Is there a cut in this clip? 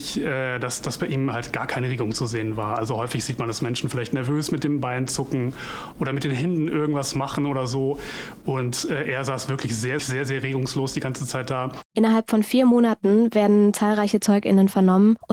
yes; 2 cuts; at 10.0 s, 11.8 s

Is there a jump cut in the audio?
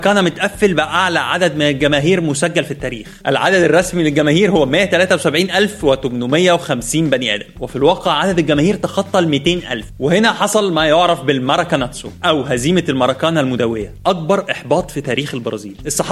no; 0 cuts

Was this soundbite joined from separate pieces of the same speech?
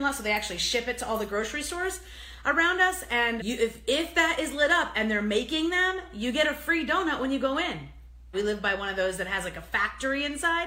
yes; 2 cuts; at 3.4 s, 8.3 s

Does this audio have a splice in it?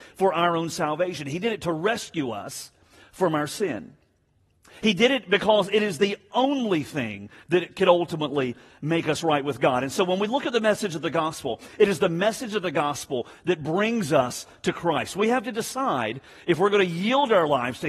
no; 0 cuts

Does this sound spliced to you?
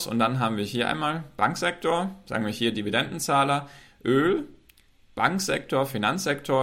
no; 0 cuts

